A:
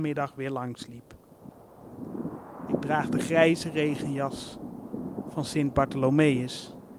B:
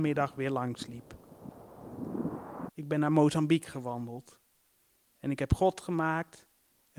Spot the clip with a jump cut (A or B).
B